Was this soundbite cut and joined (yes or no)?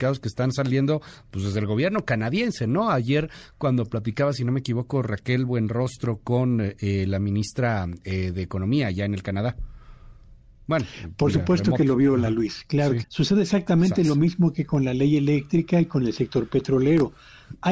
yes